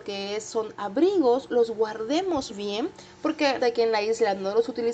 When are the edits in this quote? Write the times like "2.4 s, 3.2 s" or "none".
2.5 s, 3.6 s